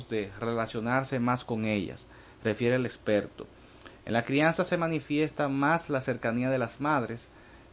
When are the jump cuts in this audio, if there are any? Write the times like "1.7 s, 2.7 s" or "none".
4.0 s

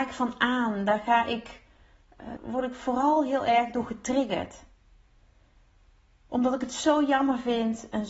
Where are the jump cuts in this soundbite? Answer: 2.4 s

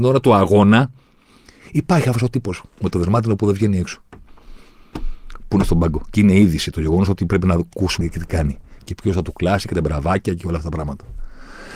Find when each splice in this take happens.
8.0 s

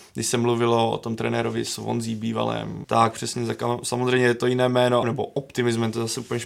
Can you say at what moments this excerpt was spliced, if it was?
2.8 s, 5.0 s

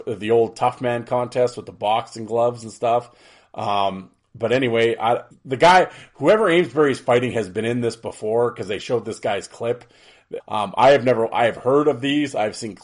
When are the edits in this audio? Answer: 5.3 s, 10.4 s

